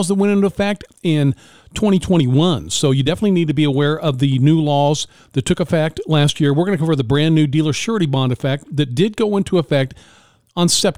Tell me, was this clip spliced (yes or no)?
no